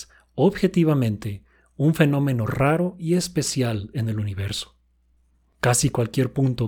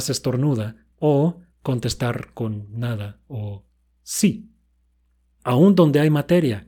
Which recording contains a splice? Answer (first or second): second